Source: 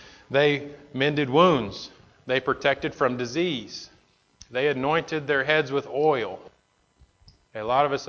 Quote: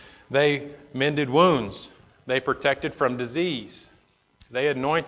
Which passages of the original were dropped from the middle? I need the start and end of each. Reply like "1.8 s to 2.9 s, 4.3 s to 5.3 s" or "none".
none